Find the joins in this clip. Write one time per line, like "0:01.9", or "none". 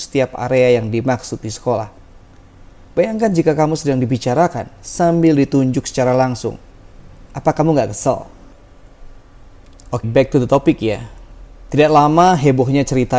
0:10.0